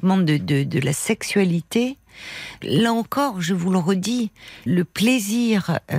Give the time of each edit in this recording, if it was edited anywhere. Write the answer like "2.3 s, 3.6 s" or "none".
2.6 s, 4.7 s